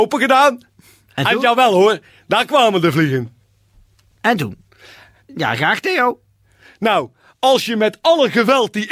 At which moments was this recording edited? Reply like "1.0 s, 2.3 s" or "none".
5.2 s